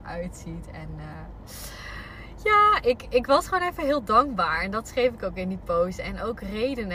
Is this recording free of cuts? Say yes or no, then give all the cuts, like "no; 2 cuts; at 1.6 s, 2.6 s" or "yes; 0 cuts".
yes; 0 cuts